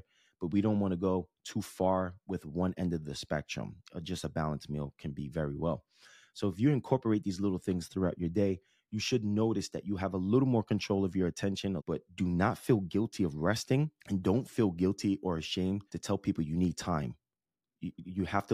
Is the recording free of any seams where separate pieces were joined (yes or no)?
no